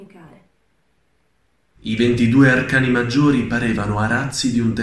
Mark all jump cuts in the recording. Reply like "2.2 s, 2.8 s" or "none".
1.8 s